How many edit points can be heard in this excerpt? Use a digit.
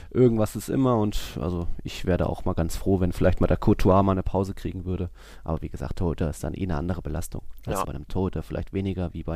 1